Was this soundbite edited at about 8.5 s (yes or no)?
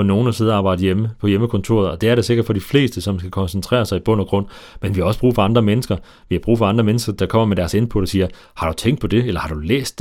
no